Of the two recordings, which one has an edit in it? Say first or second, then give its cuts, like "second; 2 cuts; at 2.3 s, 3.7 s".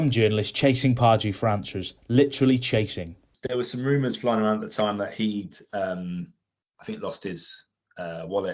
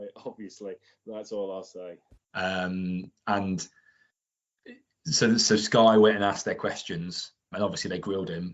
second; 2 cuts; at 2.2 s, 7.5 s